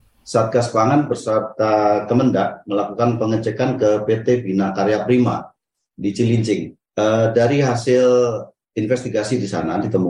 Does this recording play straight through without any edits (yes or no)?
yes